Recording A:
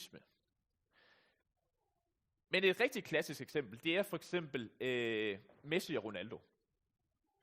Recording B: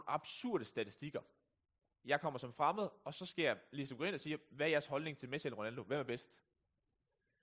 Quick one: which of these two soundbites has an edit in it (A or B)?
B